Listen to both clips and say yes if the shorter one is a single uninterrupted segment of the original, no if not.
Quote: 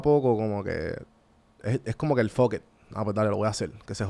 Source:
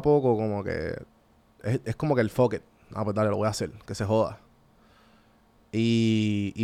yes